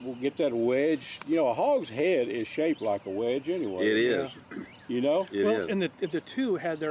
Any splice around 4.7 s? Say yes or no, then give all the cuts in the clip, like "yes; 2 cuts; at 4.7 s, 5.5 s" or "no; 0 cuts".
no; 0 cuts